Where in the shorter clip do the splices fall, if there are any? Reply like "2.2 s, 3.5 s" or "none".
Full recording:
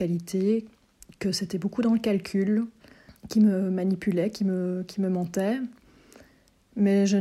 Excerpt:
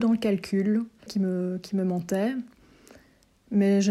1.1 s

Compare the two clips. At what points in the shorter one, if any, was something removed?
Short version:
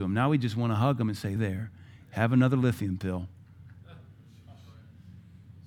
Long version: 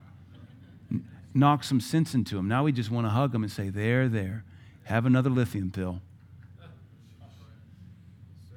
1.4 s

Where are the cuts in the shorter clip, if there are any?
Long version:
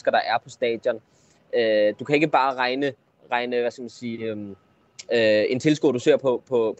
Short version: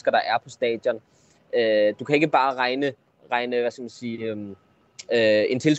none

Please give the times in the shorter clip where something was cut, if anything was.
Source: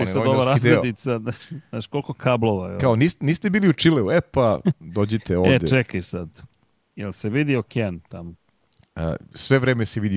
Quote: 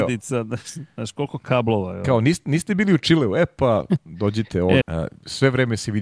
4.8 s

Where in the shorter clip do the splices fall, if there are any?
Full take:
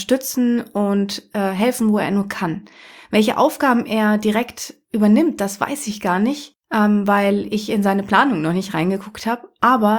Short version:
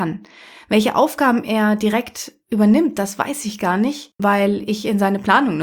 4.2 s

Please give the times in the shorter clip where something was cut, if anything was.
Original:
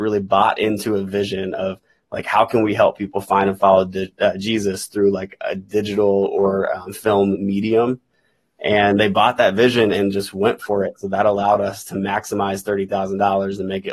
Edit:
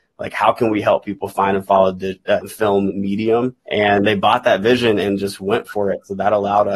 2.4 s, 3.6 s

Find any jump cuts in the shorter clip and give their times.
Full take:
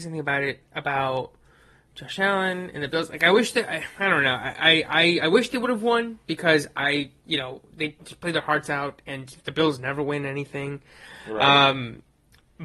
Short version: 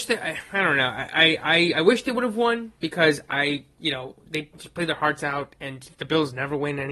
none

